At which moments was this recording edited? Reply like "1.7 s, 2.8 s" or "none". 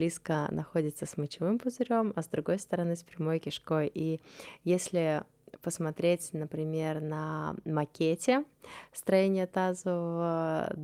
none